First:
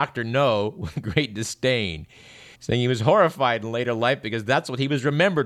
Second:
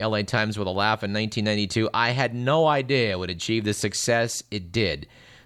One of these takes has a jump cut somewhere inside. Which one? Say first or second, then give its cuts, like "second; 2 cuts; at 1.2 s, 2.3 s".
first; 1 cut; at 2.5 s